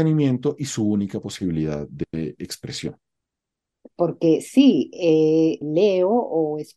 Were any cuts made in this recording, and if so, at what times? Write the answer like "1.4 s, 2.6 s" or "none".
3.9 s, 5.6 s